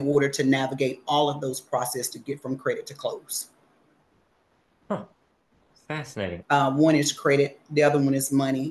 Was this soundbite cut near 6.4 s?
yes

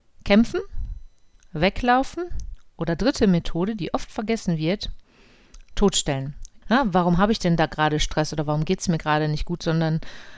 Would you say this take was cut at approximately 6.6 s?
yes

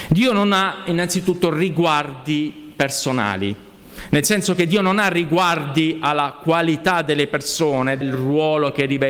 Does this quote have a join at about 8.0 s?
yes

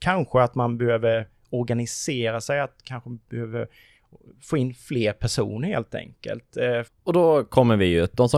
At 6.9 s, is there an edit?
yes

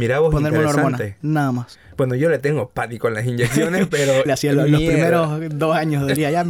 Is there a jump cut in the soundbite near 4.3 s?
yes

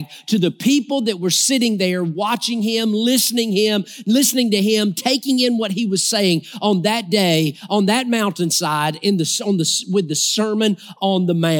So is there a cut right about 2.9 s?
no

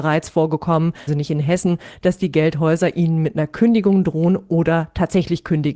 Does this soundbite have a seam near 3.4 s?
no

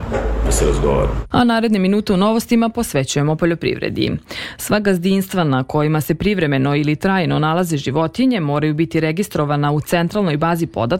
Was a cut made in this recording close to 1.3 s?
yes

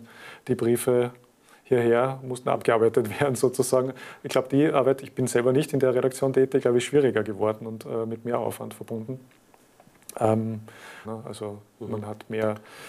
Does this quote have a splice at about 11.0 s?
yes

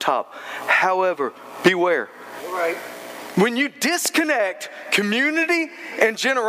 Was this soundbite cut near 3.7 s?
no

